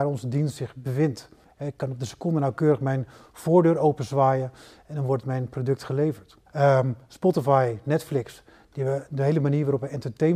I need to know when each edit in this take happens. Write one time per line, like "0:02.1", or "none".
0:06.5